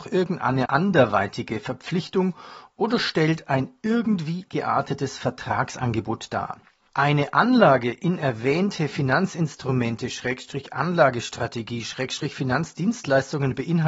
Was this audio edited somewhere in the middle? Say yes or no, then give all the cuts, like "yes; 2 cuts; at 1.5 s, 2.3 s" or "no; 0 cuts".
yes; 1 cut; at 6.9 s